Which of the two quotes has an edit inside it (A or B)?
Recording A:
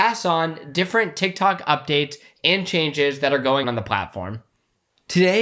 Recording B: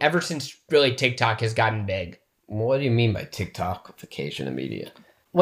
A